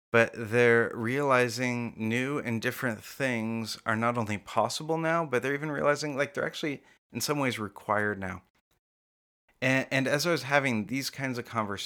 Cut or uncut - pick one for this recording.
uncut